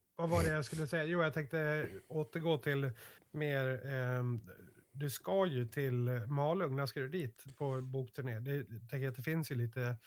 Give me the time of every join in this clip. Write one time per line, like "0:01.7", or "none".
none